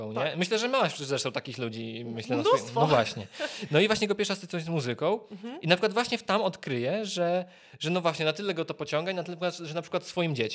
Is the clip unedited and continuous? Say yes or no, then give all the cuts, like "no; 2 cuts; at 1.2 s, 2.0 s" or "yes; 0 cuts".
yes; 0 cuts